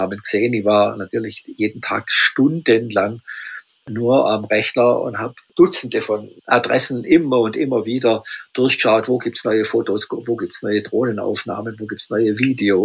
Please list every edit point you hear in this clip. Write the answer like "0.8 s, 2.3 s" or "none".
none